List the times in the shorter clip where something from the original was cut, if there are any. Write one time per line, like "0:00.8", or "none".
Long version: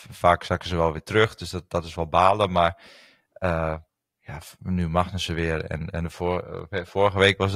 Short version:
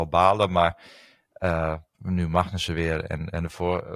0:01.9